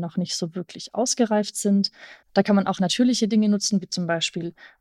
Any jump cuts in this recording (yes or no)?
no